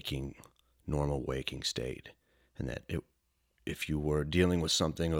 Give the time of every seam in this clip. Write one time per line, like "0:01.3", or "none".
none